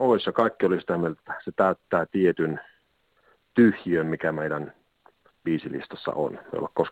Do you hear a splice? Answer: yes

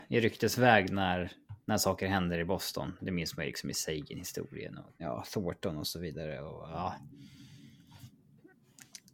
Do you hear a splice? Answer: yes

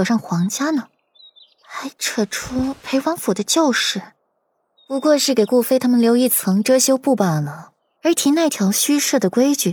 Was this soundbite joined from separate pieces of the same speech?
yes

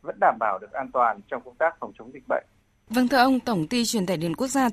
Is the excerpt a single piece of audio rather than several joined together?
yes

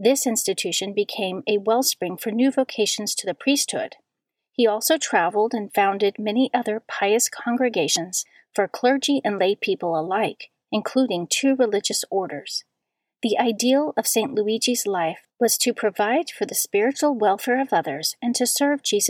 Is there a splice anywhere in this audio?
no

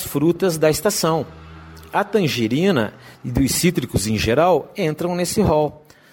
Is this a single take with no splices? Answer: yes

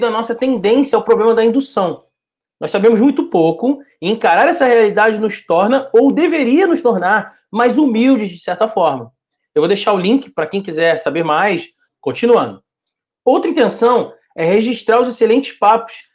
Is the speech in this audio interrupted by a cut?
yes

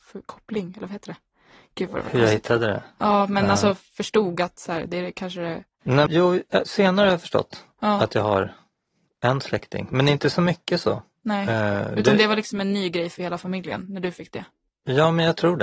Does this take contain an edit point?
yes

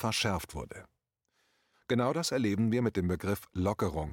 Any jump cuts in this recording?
yes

